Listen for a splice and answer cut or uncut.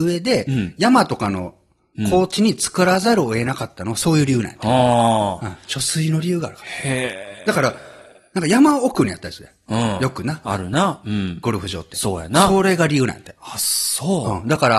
uncut